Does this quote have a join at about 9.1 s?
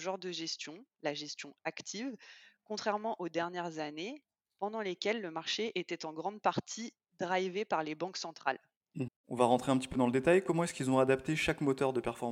yes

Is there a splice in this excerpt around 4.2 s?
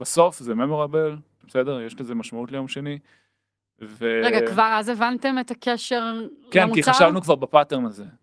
no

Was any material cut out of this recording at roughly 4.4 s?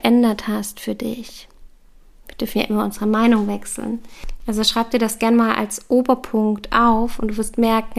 yes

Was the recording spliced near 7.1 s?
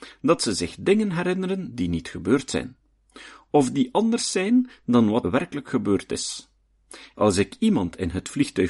yes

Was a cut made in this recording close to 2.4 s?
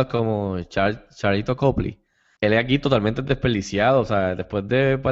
yes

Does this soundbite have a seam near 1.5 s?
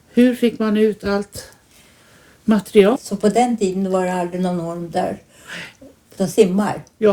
no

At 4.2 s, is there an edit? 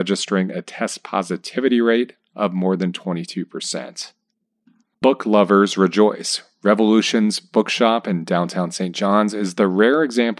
no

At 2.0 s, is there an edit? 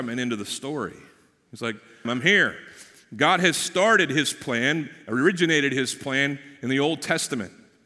yes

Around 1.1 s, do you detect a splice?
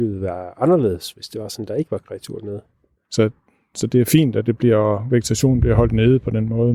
no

